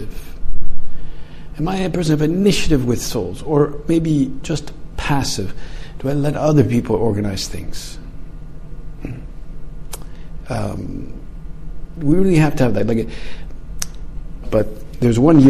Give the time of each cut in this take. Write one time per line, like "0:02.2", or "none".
0:12.0
0:14.4